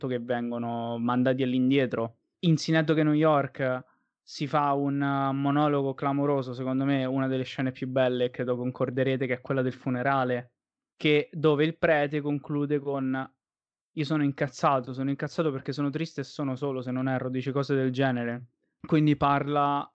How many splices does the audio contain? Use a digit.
1